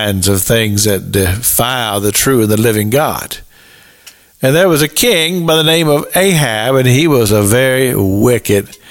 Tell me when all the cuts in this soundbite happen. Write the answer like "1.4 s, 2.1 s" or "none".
none